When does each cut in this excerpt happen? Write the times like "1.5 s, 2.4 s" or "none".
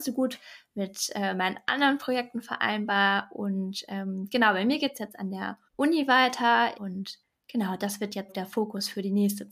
5.6 s, 6.7 s, 8.3 s